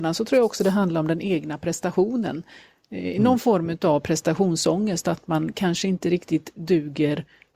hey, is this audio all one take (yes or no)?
yes